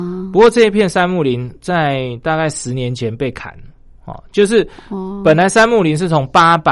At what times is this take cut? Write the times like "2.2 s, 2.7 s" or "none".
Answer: none

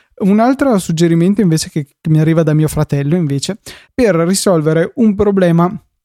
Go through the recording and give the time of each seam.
3.8 s

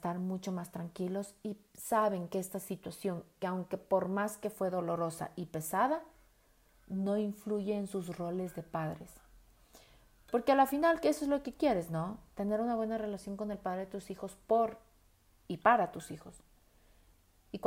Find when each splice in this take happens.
none

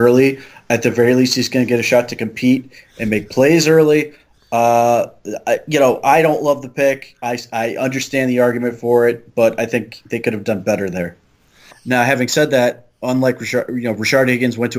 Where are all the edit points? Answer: 11.7 s

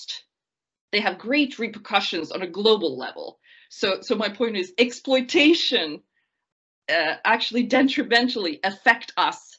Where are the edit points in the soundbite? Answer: none

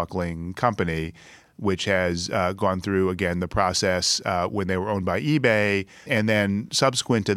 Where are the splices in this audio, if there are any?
1.5 s, 6.1 s

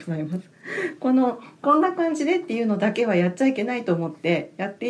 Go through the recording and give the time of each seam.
none

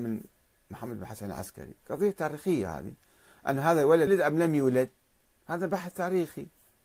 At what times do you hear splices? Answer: 4.1 s

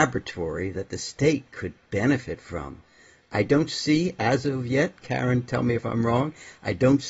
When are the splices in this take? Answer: none

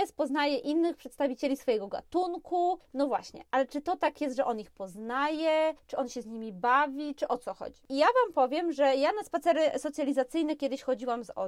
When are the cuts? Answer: none

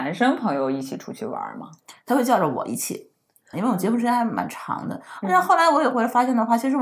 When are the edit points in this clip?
3.5 s

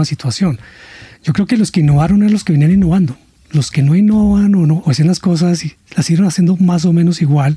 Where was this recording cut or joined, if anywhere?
4.8 s

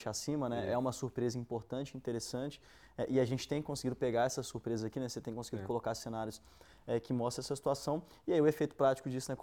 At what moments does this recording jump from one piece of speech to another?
none

